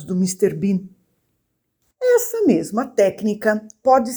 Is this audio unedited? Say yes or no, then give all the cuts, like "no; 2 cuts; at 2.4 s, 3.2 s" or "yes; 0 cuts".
yes; 0 cuts